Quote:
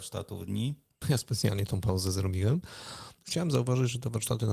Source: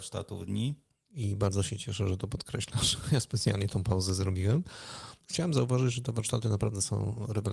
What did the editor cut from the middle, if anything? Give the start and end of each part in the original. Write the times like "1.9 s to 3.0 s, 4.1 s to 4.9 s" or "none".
1.0 s to 3.0 s